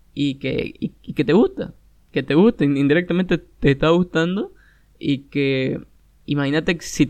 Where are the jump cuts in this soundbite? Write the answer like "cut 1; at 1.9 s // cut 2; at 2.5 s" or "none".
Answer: none